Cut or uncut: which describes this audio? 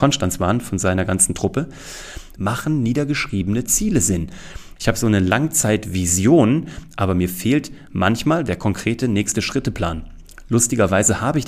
cut